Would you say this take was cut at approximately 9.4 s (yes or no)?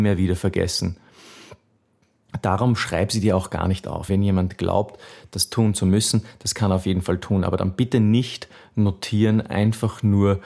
no